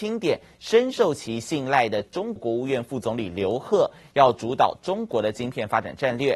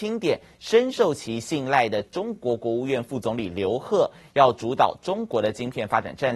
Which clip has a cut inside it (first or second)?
first